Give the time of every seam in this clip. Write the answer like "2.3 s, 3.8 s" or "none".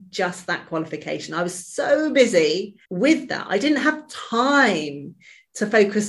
2.8 s